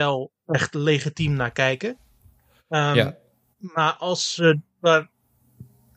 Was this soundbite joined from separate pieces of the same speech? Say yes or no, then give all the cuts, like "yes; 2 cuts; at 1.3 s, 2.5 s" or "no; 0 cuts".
no; 0 cuts